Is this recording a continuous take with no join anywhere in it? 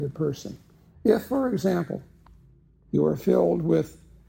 no; 1 cut; at 1.0 s

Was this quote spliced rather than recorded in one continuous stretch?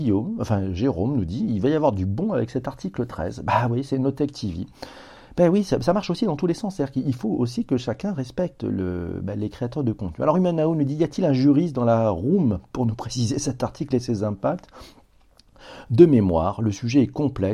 no; 0 cuts

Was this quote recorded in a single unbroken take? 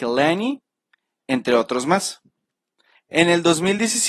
no; 1 cut; at 2.9 s

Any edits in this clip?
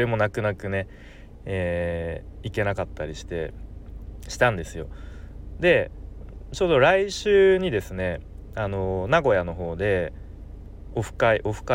no; 0 cuts

